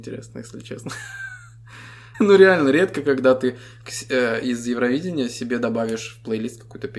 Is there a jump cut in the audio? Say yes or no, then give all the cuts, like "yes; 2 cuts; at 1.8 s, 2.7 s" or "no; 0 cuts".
yes; 1 cut; at 2.1 s